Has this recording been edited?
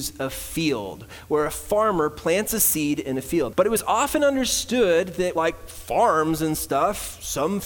yes; 2 cuts; at 3.5 s, 5.4 s

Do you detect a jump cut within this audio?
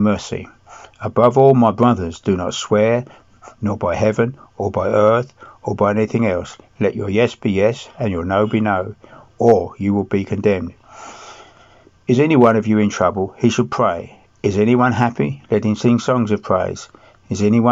no; 0 cuts

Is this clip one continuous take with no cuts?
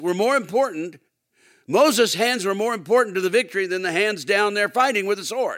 yes; 0 cuts

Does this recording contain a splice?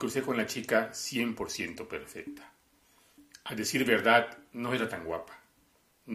no; 0 cuts

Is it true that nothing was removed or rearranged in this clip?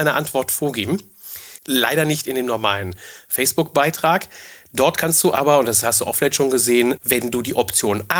no; 2 cuts; at 1.6 s, 7.0 s

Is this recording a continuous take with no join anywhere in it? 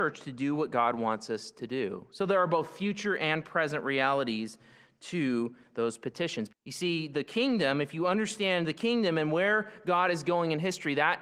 no; 1 cut; at 6.5 s

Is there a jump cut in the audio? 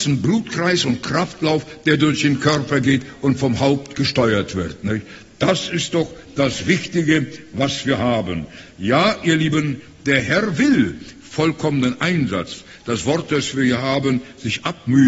no; 0 cuts

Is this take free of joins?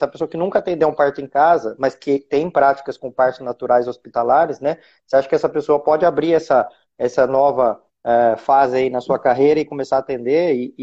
yes; 0 cuts

